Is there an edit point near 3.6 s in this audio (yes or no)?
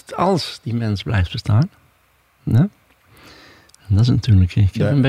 no